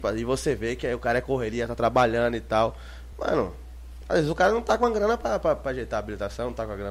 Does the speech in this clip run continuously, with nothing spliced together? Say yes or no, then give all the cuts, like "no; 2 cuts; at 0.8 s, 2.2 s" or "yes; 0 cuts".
yes; 0 cuts